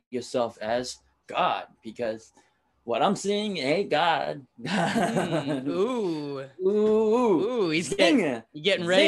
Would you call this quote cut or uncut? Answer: uncut